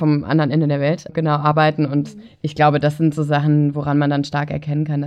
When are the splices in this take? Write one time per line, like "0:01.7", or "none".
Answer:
0:01.1

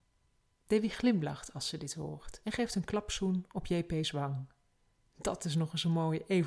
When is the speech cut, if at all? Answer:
none

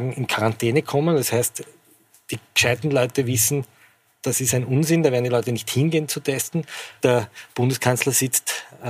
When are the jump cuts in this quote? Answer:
0:07.0

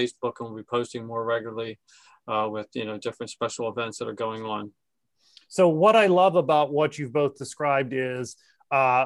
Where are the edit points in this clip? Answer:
none

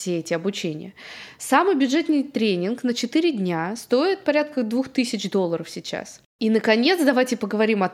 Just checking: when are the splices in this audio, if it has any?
0:06.2

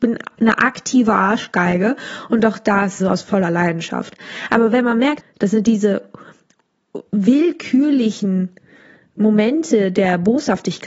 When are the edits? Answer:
0:03.0
0:05.2

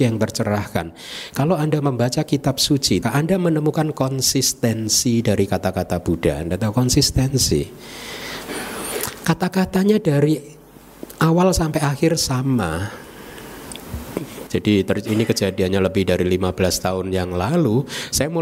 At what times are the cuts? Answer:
0:03.0
0:14.5

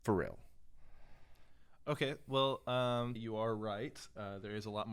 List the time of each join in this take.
0:03.2

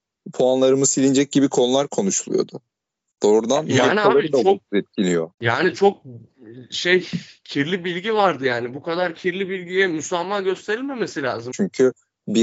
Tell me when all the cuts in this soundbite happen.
0:05.3
0:11.5

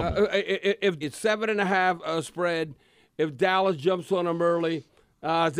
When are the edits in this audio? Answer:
0:01.0

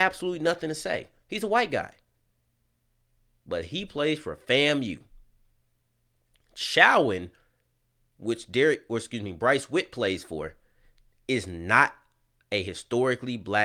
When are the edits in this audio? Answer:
none

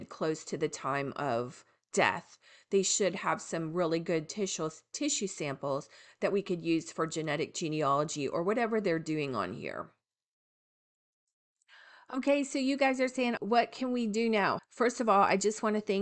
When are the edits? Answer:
0:13.4
0:14.6

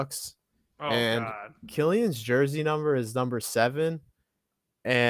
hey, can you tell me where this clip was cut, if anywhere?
none

